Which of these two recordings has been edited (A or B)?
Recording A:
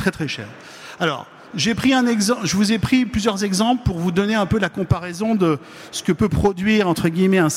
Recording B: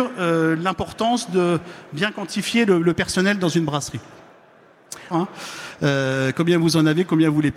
B